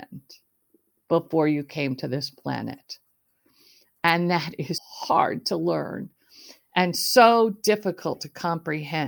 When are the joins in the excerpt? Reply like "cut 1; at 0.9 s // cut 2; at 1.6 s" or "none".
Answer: cut 1; at 4.8 s